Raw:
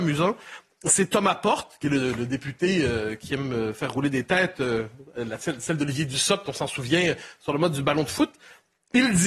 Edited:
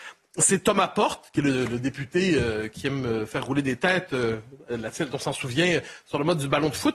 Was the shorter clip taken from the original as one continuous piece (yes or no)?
no